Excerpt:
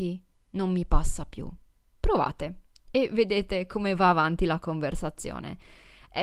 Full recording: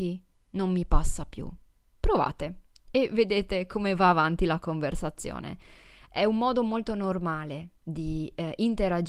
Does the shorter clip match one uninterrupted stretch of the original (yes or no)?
yes